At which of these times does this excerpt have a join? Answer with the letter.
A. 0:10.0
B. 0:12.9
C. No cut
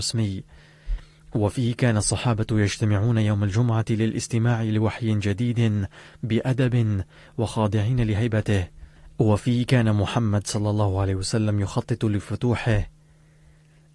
C